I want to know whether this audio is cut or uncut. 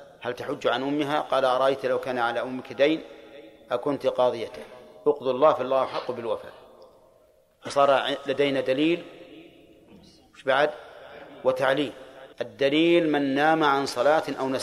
cut